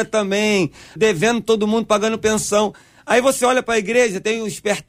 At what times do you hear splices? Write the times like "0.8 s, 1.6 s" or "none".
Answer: 1.0 s